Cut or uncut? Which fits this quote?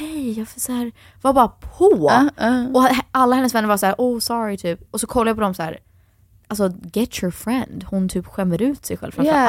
uncut